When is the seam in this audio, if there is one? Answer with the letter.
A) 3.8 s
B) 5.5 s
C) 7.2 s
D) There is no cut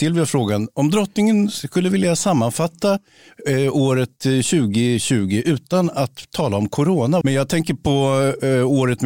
C